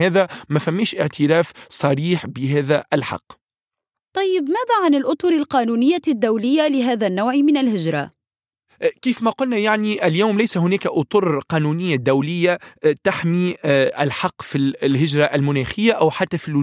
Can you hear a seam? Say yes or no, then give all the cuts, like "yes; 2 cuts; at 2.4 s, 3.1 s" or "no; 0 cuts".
no; 0 cuts